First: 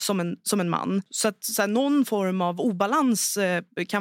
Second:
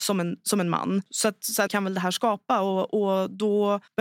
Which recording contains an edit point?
second; 1 cut; at 1.7 s

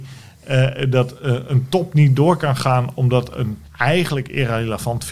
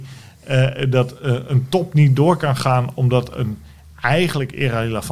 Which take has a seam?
first; 1 cut; at 3.7 s

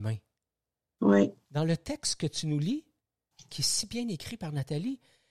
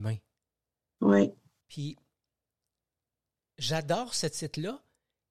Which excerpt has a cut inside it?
first; 2 cuts; at 1.4 s, 3.5 s

